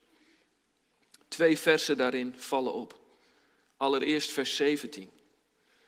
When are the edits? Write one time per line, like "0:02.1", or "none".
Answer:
none